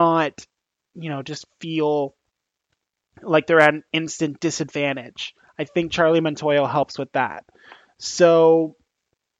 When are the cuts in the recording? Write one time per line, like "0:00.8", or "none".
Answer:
none